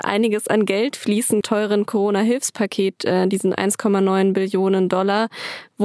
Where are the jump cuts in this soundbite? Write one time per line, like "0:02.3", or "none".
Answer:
0:01.4